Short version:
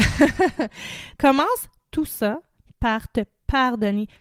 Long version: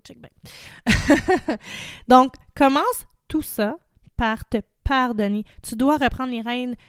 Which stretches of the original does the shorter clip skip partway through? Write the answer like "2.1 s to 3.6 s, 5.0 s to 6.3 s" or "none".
2.1 s to 2.5 s

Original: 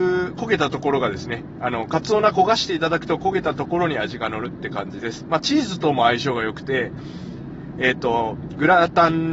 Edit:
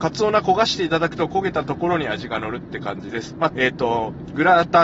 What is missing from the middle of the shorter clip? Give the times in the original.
5.4 s to 7.7 s

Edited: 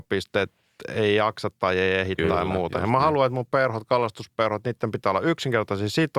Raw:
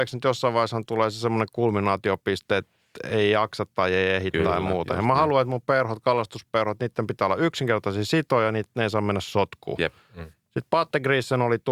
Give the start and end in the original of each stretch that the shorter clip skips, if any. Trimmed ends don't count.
none

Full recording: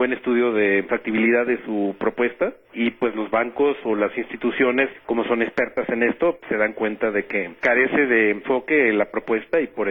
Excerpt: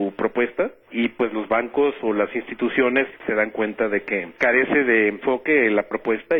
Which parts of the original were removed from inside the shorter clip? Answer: 5.0 s to 6.4 s

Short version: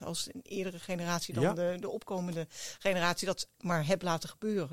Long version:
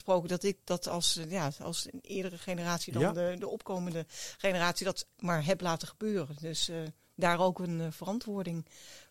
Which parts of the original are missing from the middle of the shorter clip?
none

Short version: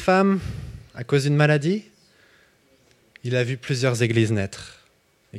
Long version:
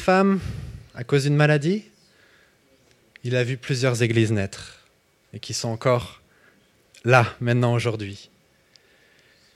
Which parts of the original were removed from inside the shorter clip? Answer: none

